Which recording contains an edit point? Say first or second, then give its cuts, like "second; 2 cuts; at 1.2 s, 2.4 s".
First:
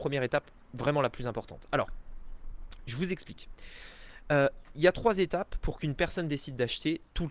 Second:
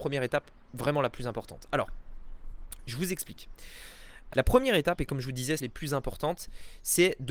second; 2 cuts; at 4.3 s, 5.6 s